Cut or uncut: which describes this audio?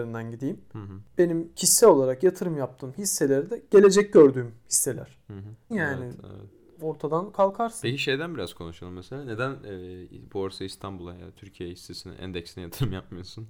cut